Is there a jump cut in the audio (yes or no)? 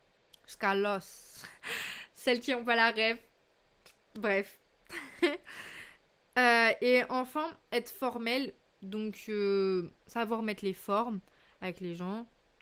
no